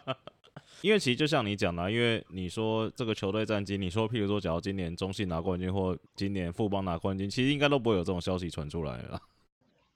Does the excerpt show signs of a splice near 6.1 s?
yes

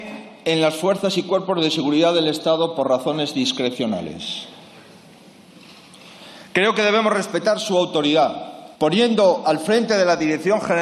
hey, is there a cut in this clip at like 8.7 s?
yes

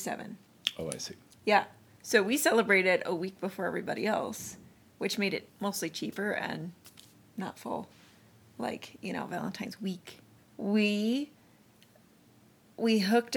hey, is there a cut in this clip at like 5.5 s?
yes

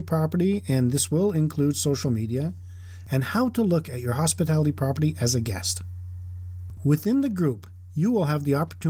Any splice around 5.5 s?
no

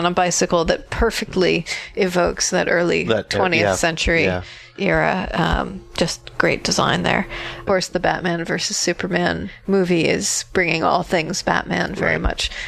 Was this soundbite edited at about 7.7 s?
yes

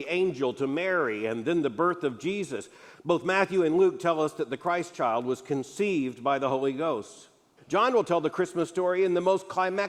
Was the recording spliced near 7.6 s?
yes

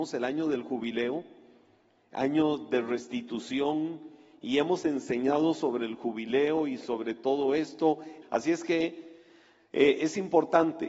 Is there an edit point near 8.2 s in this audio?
yes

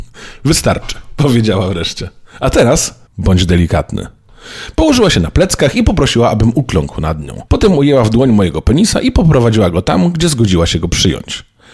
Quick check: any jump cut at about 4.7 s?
no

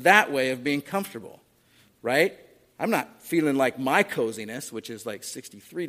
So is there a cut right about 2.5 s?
no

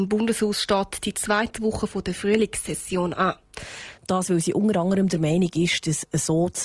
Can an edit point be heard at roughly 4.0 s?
yes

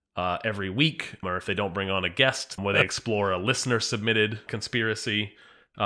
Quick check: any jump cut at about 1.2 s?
yes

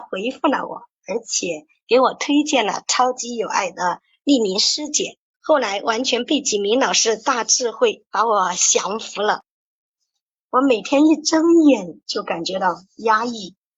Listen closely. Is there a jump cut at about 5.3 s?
yes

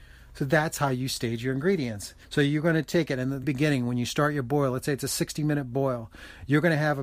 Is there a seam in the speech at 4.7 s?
no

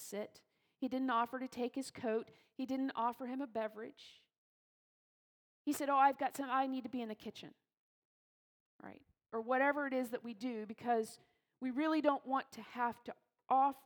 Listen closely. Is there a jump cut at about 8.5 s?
no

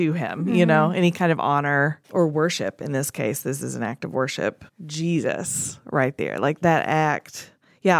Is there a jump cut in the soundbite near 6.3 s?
no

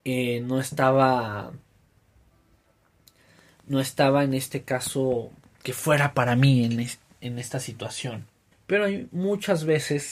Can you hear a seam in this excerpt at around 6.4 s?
no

